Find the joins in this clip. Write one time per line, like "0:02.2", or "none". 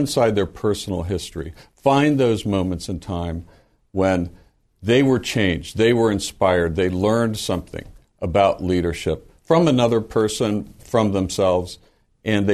0:10.8